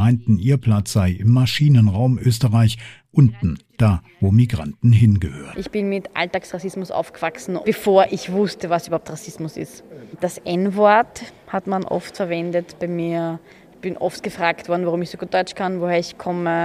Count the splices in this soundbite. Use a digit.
0